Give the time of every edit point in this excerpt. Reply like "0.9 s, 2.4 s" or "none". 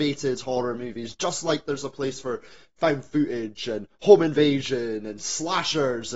1.1 s